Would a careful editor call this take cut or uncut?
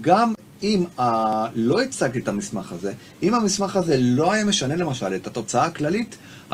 uncut